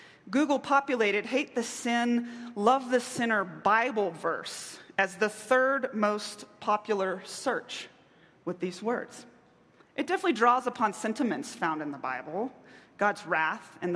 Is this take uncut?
no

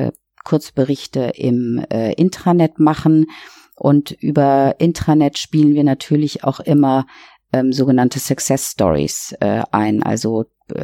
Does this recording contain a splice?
no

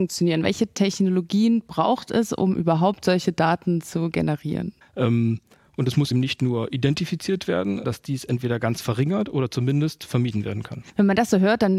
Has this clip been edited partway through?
yes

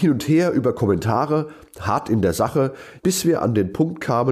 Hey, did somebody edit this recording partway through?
yes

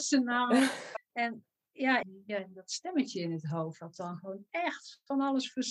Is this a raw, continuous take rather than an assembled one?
no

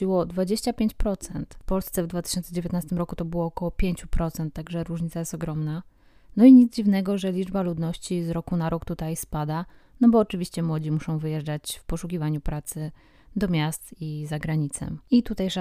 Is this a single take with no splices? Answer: yes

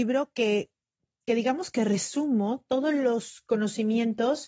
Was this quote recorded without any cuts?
yes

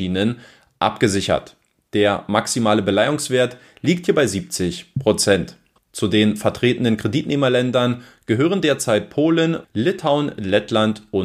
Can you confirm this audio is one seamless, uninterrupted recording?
no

